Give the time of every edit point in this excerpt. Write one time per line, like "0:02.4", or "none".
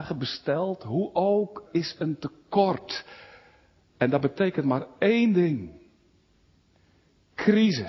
0:01.7